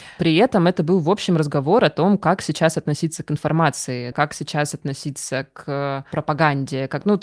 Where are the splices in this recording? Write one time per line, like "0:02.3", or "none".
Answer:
0:04.1